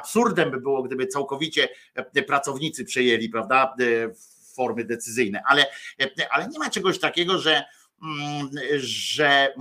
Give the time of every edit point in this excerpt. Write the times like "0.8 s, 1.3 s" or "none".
none